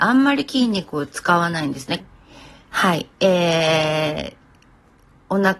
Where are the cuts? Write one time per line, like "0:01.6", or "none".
0:02.0

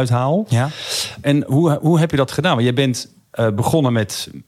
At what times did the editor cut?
0:01.2

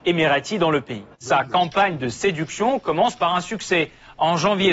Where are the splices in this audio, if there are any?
0:01.1

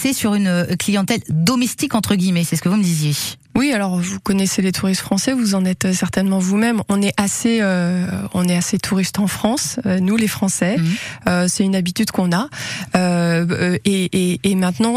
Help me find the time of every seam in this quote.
none

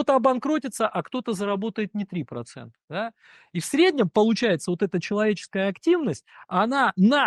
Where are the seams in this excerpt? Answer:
none

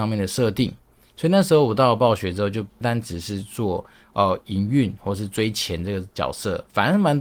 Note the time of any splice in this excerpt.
0:02.8

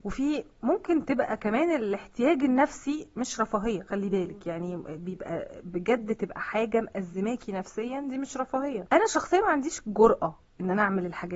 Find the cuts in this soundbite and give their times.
none

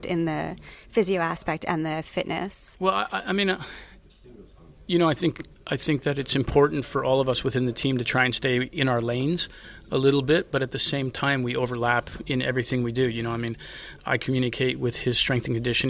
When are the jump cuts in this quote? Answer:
none

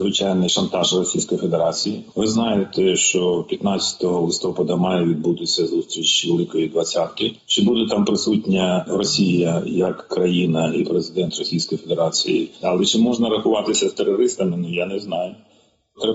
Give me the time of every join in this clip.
0:12.6

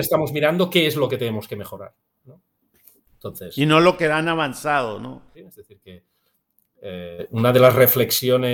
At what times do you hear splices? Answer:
0:05.3

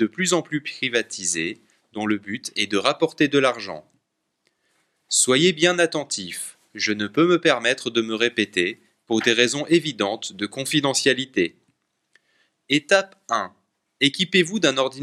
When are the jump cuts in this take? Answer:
none

